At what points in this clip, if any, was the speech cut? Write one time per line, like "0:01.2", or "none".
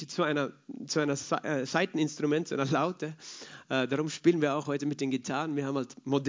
none